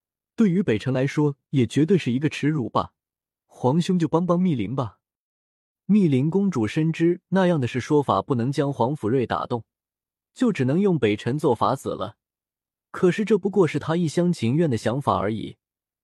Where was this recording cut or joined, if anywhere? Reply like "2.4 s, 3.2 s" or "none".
3.5 s